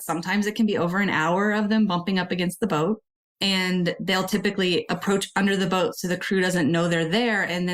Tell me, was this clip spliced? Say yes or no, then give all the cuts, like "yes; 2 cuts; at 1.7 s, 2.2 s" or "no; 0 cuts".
no; 0 cuts